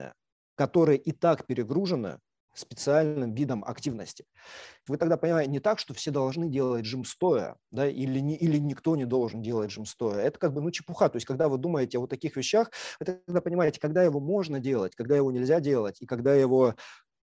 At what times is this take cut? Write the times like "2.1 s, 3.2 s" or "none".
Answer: 4.9 s